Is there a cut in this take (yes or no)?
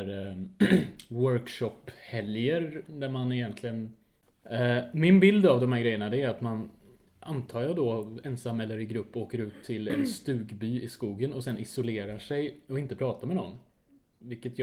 no